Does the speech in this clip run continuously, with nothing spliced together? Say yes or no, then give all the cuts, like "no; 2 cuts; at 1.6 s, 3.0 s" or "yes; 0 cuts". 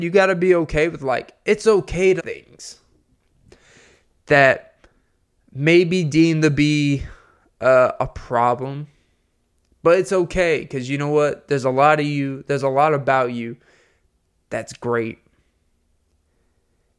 no; 1 cut; at 2.2 s